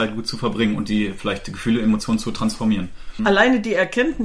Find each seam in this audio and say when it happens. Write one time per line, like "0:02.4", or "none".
0:03.2